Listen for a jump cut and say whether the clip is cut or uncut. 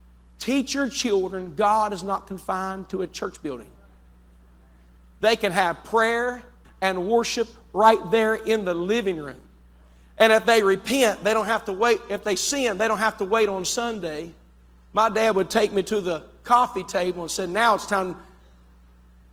cut